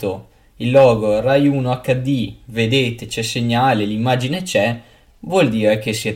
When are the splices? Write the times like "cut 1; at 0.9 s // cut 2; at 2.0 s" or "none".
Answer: none